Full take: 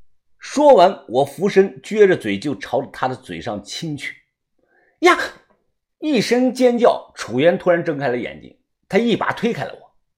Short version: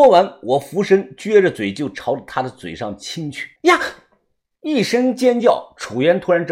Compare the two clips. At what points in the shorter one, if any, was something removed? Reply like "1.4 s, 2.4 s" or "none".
3.6 s